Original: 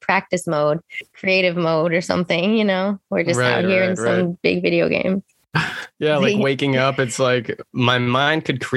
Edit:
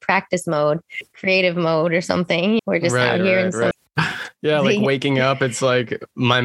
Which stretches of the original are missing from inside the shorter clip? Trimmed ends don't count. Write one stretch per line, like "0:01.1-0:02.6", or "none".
0:02.6-0:03.0
0:04.1-0:05.3